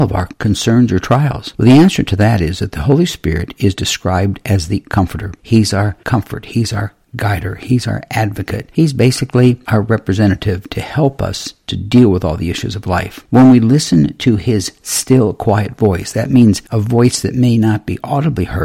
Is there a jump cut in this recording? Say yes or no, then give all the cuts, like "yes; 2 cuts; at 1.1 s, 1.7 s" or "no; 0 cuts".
no; 0 cuts